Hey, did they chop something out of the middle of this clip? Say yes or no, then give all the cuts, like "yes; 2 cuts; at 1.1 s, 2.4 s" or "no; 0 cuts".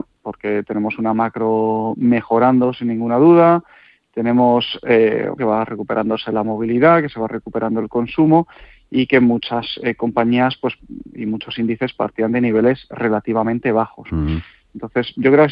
yes; 1 cut; at 5.4 s